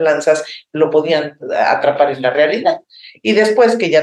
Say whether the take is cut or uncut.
uncut